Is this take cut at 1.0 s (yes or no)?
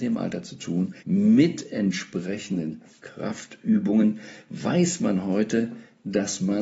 yes